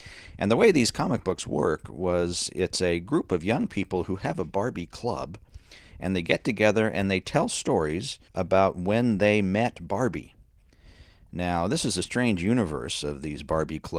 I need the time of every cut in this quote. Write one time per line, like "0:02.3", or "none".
0:08.3